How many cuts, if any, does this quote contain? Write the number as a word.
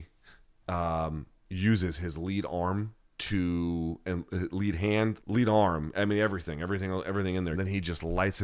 two